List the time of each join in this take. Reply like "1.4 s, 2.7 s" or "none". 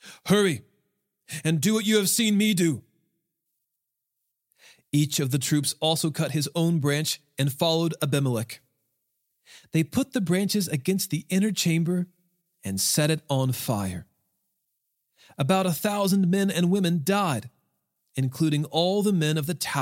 none